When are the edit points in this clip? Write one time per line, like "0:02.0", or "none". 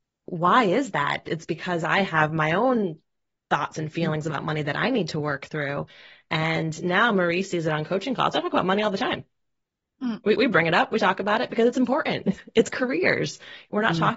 none